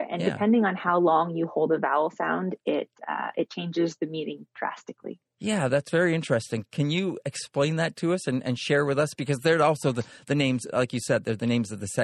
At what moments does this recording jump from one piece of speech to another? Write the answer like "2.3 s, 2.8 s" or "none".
none

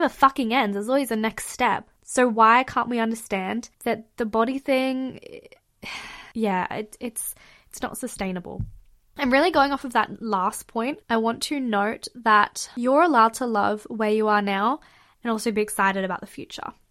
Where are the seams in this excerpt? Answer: 2.0 s, 6.3 s, 11.0 s

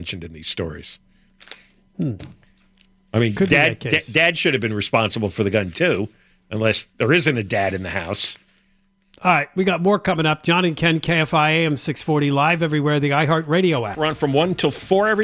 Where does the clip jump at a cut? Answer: none

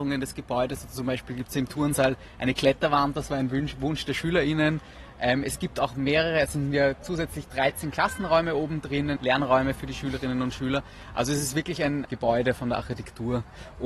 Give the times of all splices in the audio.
9.2 s, 12.0 s

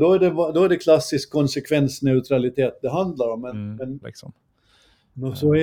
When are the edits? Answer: 4.0 s

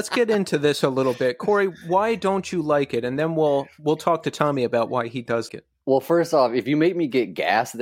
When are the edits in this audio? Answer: 5.5 s

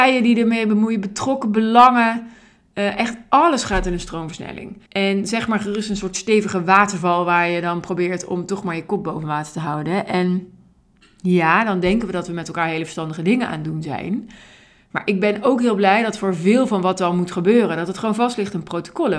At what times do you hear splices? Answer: 4.9 s

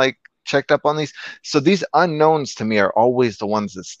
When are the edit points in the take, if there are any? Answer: none

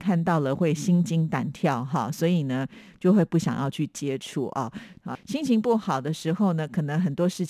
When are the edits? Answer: 5.1 s

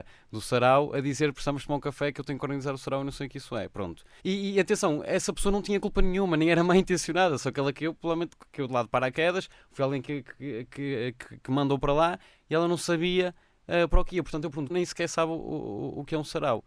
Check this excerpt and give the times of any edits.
4.2 s, 14.7 s

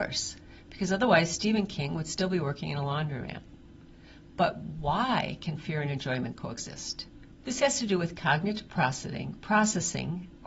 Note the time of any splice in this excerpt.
7.4 s

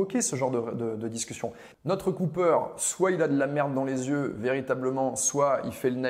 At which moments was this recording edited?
1.7 s

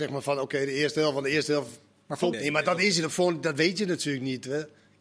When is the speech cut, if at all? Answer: 2.3 s

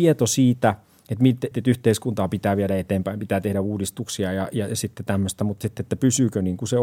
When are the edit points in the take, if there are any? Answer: 1.5 s

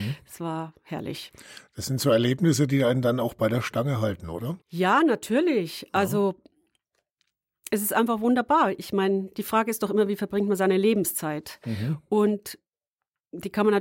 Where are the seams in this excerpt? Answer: 4.6 s

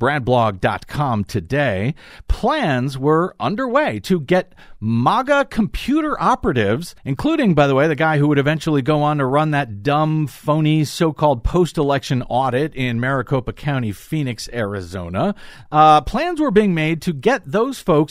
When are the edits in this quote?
7.0 s, 15.7 s

